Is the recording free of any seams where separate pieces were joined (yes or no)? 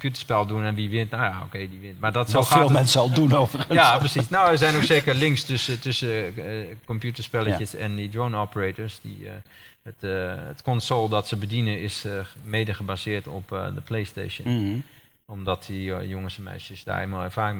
yes